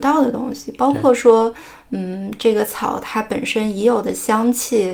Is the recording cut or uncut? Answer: uncut